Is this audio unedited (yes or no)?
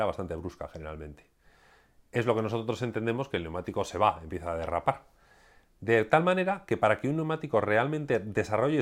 yes